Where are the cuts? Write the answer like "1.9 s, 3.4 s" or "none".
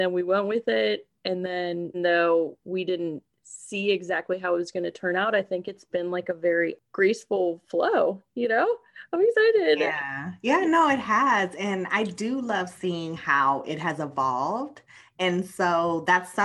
1.9 s